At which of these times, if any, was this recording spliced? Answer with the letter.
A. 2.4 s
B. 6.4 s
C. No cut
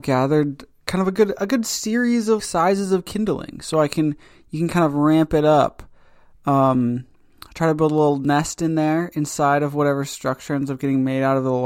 A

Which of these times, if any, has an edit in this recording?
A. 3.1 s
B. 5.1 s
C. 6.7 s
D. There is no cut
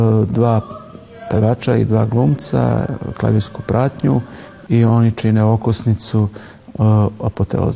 D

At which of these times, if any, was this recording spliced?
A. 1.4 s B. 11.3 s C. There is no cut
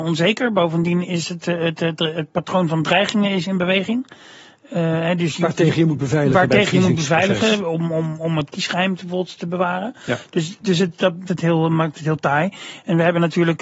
B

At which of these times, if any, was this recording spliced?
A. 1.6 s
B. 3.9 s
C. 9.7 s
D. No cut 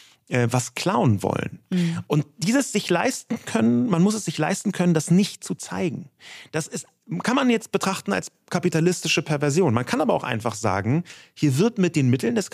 D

